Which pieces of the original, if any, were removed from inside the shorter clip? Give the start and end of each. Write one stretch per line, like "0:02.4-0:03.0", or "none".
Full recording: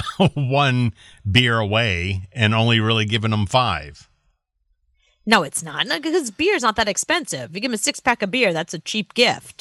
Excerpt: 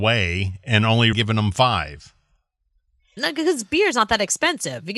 0:02.8-0:03.1
0:05.1-0:05.8